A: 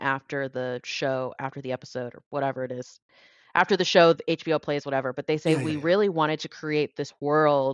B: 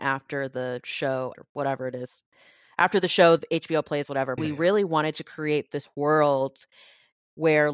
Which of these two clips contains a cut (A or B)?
B